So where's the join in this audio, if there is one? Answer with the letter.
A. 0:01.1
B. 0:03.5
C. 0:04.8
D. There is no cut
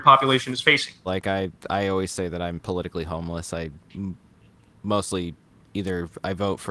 A